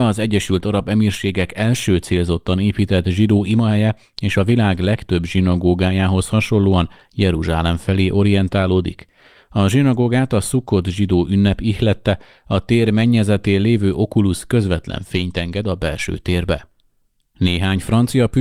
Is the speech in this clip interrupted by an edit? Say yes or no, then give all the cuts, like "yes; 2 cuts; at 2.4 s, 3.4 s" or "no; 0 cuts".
no; 0 cuts